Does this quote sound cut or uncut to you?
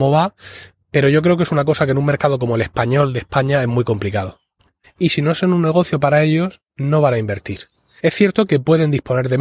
cut